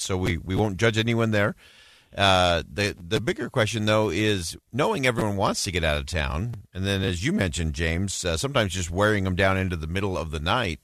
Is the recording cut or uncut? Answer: uncut